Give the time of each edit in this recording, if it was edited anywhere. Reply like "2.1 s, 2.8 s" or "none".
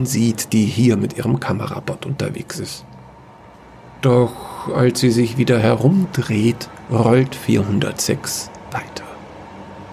8.7 s